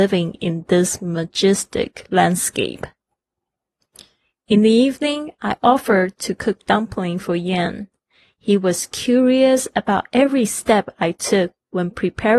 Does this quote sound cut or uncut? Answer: uncut